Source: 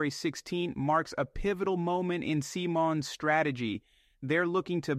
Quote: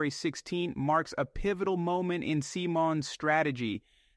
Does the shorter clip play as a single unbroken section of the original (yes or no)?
yes